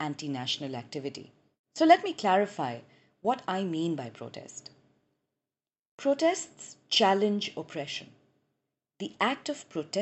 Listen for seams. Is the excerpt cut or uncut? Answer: uncut